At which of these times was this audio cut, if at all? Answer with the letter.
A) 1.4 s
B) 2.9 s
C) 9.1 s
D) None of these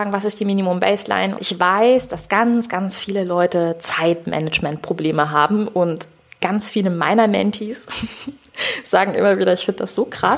A